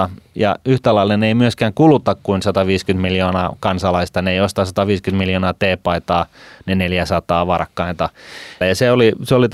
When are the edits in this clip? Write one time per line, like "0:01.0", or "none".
0:08.6